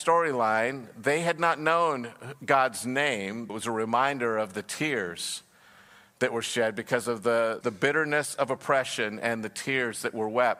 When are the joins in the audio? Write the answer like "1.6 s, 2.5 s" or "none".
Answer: 3.5 s, 7.6 s

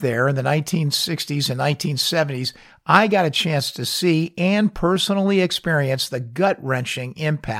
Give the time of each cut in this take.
none

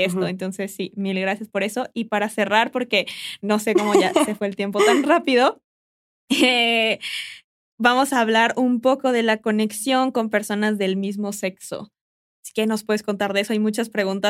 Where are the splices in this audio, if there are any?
none

